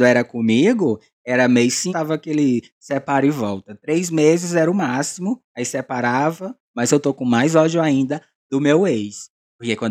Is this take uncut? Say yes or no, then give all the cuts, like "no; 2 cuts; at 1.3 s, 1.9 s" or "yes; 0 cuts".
no; 2 cuts; at 1.9 s, 6.7 s